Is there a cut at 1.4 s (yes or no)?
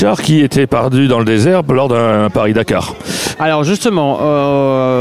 no